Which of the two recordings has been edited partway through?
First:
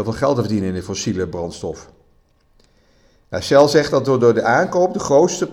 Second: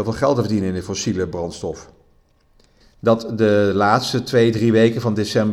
second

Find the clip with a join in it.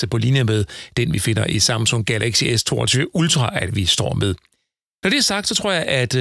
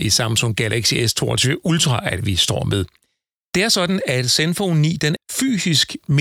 second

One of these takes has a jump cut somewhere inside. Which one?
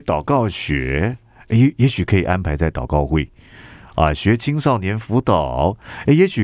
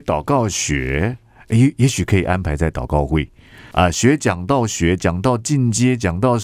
second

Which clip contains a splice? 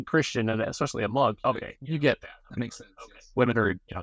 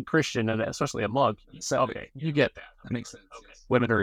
first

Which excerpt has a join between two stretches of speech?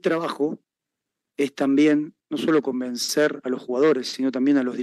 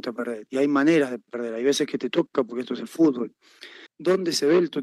second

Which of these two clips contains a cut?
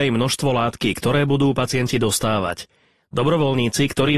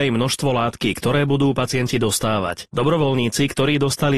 second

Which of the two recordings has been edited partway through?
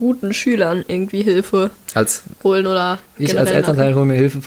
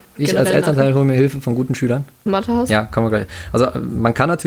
second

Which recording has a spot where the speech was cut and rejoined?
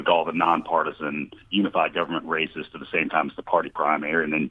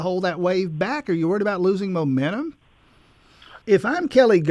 second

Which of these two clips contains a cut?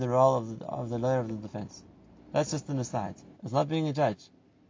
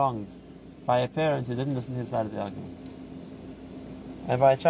first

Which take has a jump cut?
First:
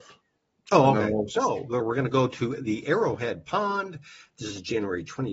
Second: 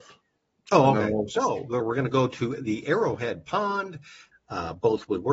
second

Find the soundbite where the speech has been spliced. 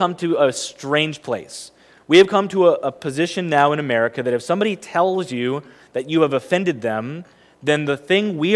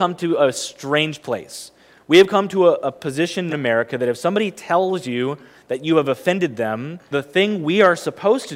second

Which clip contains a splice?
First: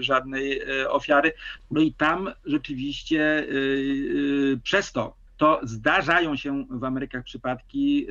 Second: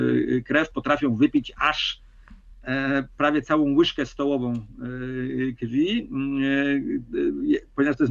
first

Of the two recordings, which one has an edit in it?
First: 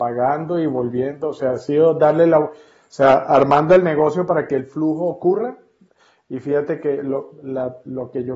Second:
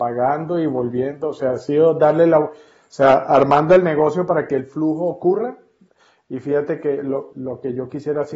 second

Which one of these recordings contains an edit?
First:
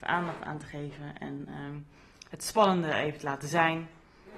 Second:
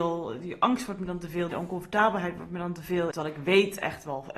second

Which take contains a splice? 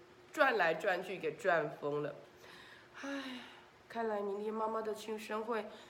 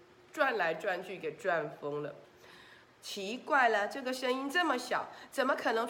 second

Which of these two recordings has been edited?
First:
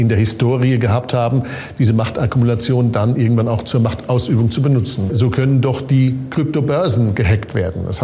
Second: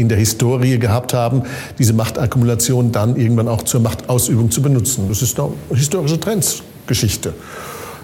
first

